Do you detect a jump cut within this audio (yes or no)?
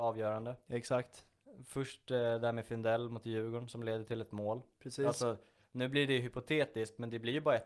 no